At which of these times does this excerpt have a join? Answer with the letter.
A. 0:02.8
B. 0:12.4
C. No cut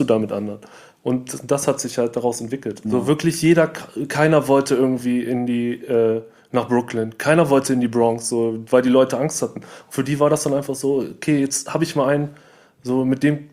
A